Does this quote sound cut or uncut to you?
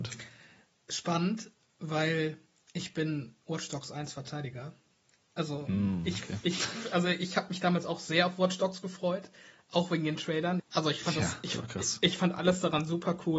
cut